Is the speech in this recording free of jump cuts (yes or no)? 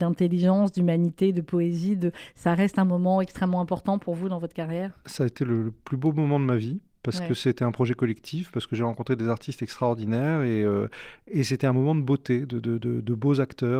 yes